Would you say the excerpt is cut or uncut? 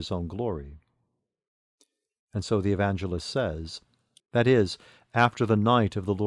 cut